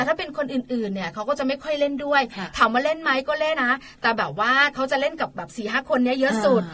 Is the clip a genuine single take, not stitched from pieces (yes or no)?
no